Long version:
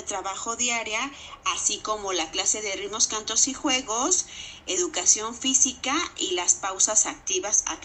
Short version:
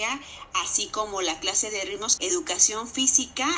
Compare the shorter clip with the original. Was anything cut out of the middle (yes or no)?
yes